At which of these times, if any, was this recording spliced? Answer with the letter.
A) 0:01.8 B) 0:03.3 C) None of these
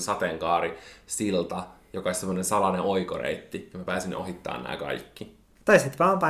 C